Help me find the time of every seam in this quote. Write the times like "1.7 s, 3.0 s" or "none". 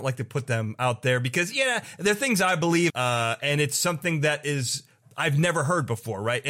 2.9 s